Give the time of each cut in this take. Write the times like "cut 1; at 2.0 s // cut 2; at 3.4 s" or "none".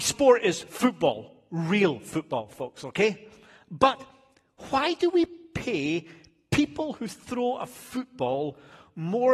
none